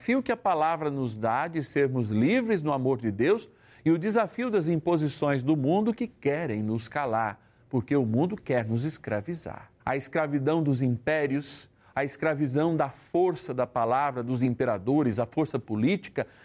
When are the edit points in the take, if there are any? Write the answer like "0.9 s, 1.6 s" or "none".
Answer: 9.8 s